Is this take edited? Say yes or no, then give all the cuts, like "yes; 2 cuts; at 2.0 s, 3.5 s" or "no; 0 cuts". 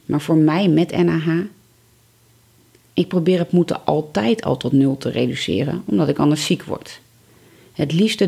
no; 0 cuts